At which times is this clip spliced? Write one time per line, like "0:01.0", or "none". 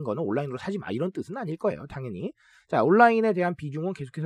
none

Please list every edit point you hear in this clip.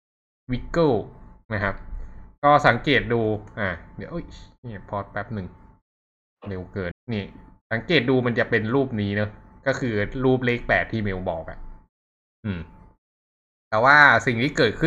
0:06.9

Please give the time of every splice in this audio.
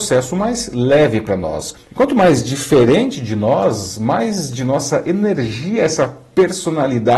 0:01.7

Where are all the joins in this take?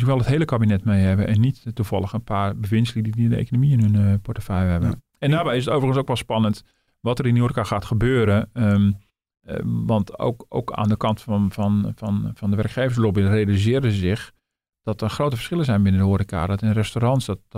none

